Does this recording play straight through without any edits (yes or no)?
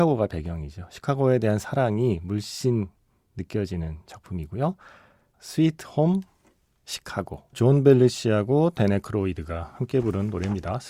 no